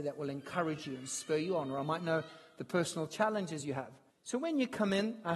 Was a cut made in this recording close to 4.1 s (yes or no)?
yes